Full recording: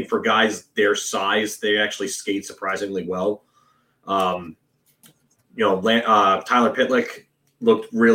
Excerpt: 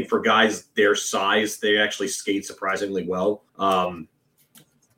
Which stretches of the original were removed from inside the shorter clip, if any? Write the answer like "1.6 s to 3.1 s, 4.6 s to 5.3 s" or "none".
3.5 s to 4.0 s